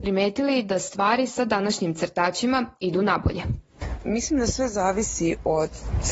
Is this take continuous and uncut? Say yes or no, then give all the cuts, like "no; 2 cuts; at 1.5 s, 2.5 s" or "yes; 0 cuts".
yes; 0 cuts